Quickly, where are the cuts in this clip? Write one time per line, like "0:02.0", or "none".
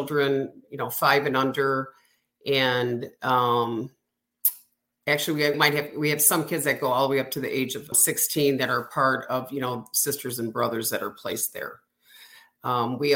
0:05.5
0:07.9